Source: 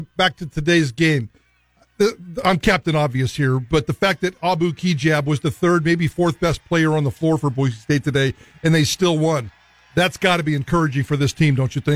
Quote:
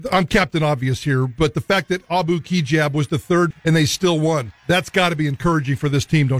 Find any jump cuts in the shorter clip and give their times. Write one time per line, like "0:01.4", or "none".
0:03.5
0:04.6